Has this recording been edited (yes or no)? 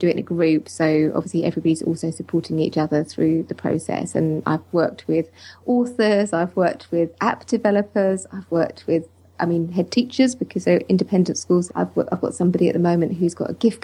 yes